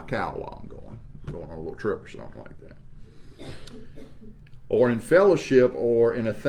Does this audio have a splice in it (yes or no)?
no